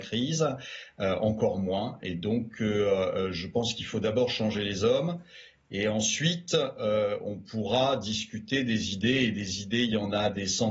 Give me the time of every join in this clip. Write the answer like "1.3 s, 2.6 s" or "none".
none